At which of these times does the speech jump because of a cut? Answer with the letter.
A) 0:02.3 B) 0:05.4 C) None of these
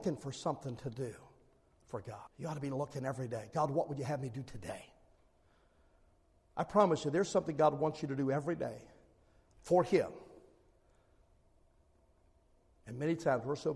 A